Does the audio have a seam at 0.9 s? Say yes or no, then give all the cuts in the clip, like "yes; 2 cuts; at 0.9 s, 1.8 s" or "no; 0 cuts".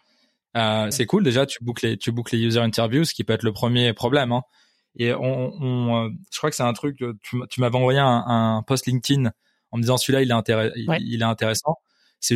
yes; 1 cut; at 0.9 s